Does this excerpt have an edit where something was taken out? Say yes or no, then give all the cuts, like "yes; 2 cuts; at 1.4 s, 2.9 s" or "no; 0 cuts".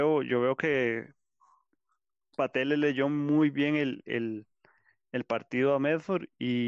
no; 0 cuts